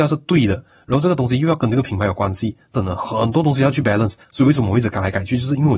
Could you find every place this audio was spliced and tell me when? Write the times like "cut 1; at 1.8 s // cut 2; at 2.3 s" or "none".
cut 1; at 2.7 s // cut 2; at 4.2 s